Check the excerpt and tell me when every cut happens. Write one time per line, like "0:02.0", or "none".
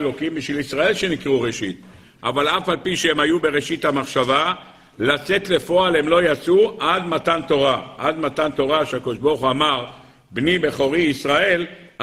none